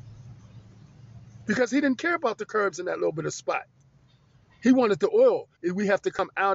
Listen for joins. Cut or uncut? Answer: cut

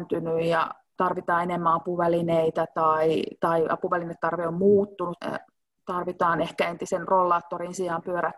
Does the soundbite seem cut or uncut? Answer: cut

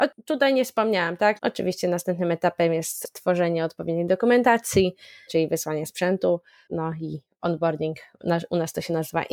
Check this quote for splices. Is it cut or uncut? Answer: cut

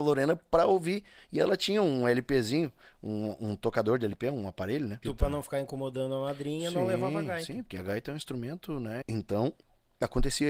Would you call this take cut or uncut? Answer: cut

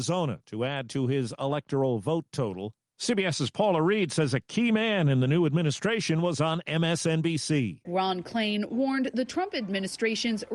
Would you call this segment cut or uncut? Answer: uncut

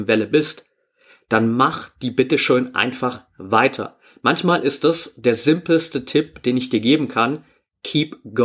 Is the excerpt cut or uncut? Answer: uncut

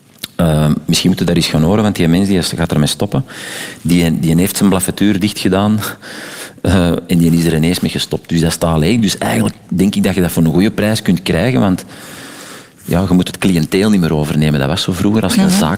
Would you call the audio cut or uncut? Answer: uncut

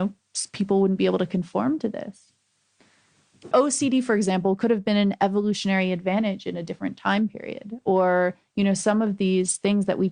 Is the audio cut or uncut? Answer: cut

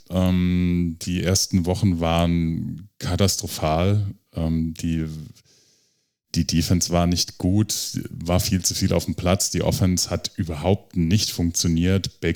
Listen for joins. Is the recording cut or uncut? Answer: uncut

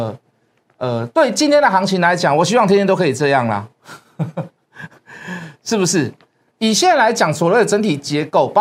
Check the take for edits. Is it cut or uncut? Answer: cut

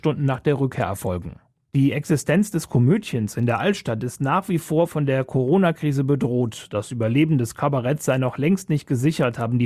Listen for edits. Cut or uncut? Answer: uncut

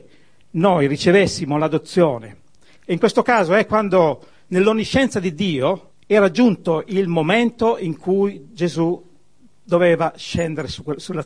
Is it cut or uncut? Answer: cut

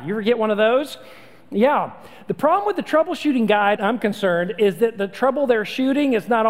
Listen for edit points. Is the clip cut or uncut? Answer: cut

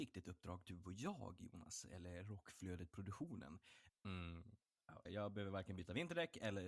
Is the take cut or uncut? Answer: cut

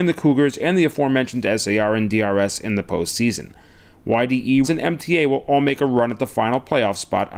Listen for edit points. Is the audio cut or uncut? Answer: cut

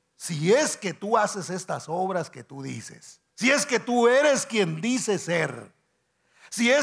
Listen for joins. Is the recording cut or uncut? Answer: cut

